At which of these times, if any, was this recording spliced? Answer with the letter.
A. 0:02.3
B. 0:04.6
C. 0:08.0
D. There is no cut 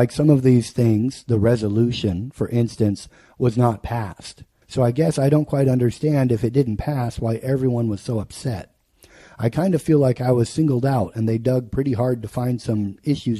B